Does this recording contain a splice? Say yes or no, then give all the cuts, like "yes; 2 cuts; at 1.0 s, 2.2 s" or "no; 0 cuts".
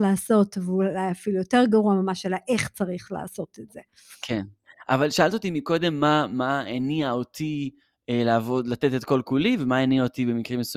no; 0 cuts